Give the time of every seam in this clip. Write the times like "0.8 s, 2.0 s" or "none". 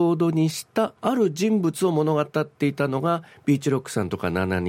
1.0 s